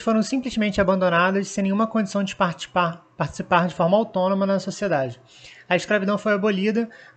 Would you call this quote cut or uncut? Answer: uncut